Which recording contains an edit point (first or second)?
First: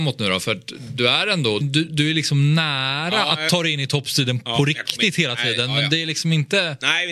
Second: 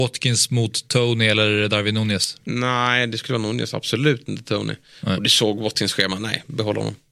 first